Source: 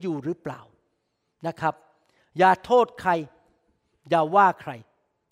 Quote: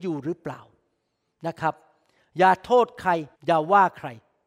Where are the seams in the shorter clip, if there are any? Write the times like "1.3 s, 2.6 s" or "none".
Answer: 3.3 s